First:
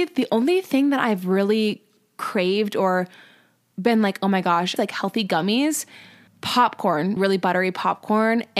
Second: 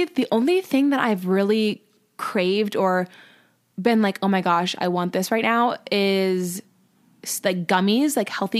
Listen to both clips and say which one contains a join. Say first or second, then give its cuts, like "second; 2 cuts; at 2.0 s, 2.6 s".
first; 2 cuts; at 4.8 s, 7.2 s